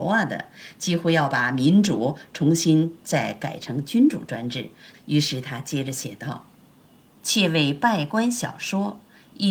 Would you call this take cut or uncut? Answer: cut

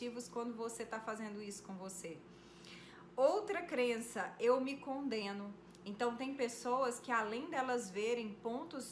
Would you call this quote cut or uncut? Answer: uncut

